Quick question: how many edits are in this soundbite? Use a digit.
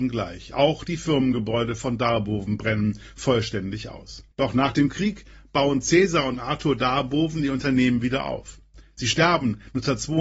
1